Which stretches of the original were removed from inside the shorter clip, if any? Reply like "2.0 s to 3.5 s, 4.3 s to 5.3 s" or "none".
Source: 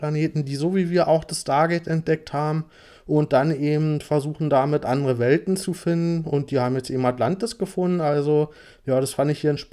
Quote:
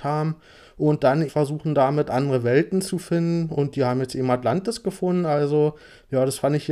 3.6 s to 4.0 s